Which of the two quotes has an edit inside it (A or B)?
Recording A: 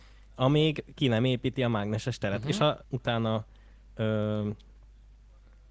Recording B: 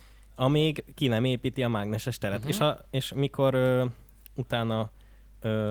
A